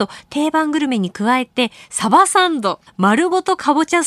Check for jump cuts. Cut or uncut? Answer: cut